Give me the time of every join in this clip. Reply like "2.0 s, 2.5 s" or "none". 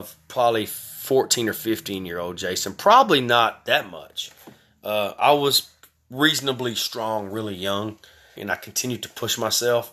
8.4 s